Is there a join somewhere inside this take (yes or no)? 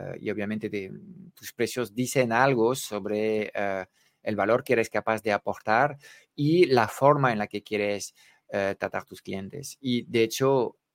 no